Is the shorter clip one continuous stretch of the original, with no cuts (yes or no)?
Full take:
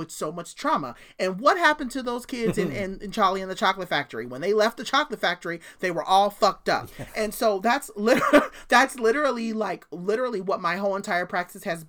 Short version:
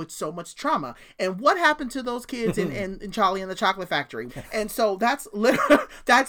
no